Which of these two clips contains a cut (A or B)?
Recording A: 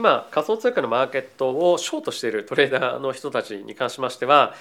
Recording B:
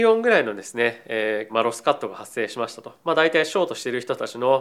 B